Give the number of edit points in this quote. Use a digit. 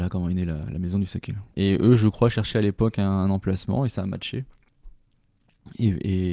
1